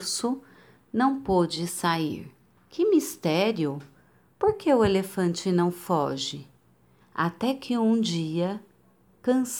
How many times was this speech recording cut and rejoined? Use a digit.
2